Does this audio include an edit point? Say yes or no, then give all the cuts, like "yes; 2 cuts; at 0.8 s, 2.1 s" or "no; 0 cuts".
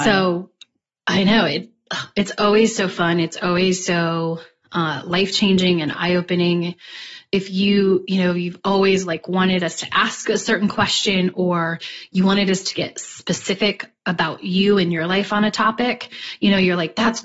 no; 0 cuts